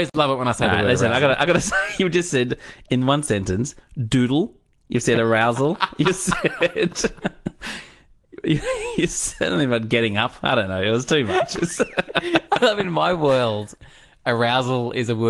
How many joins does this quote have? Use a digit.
0